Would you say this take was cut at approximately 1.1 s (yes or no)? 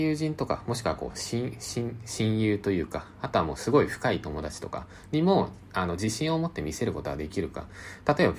no